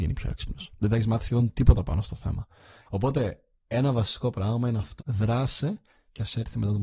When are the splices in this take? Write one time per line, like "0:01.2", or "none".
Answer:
0:02.9
0:05.0